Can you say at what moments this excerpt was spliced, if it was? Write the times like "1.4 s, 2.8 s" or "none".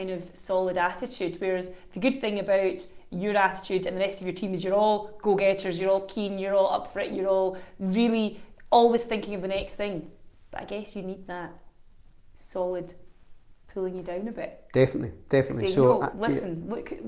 none